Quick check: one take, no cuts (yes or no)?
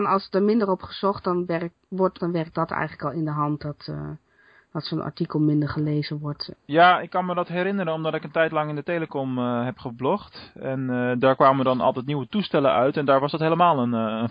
no